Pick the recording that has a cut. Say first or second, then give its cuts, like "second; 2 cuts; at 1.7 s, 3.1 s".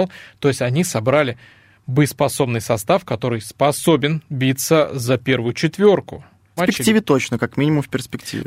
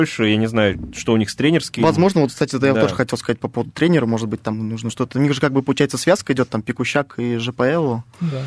first; 1 cut; at 6.6 s